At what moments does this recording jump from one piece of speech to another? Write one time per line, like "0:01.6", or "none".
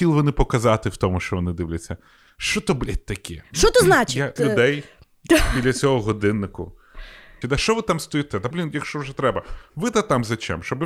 0:04.4
0:07.4
0:08.5